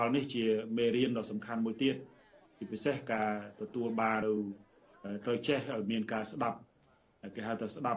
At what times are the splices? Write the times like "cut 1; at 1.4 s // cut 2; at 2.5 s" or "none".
cut 1; at 4.2 s

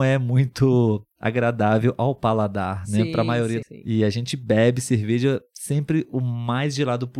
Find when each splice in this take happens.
cut 1; at 3.6 s

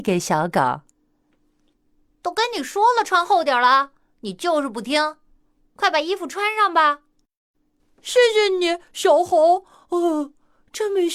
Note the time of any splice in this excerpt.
none

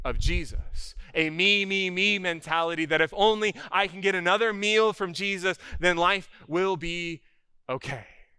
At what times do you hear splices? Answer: none

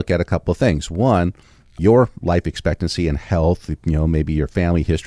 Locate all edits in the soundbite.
none

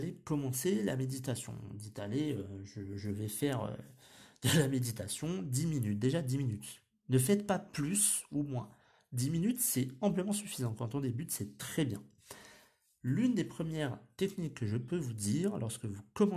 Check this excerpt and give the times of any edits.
none

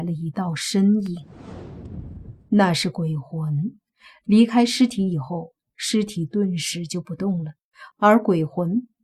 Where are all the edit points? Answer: none

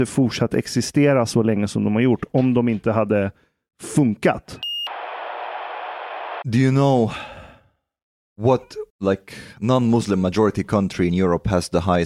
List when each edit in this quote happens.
cut 1; at 8.9 s

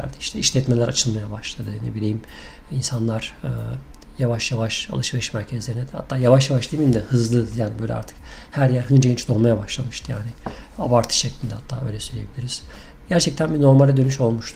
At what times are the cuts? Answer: none

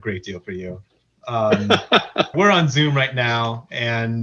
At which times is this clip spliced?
cut 1; at 2.3 s

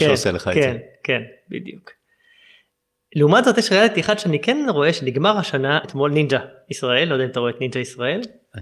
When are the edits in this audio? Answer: cut 1; at 5.8 s

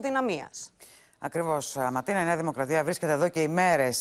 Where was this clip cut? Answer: none

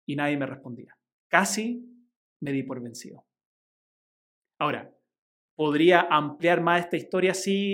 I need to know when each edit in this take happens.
cut 1; at 1.2 s

